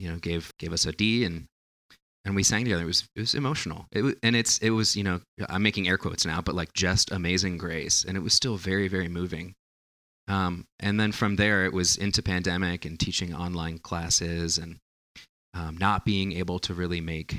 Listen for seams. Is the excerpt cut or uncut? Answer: uncut